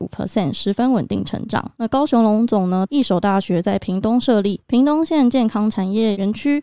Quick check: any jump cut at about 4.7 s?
no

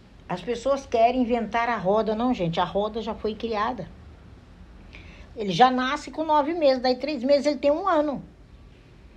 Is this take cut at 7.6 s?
no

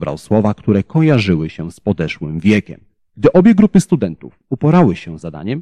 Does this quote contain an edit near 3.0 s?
yes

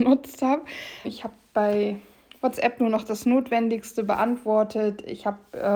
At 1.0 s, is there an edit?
yes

